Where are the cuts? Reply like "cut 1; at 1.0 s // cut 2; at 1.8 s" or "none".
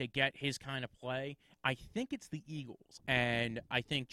cut 1; at 3.0 s